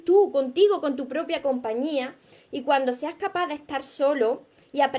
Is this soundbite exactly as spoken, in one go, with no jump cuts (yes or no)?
yes